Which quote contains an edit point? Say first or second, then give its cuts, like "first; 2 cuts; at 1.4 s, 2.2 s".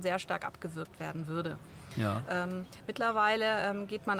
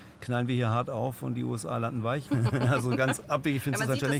second; 1 cut; at 2.3 s